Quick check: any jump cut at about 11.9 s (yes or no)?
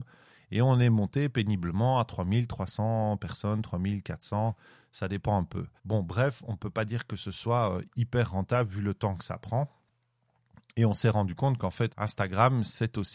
yes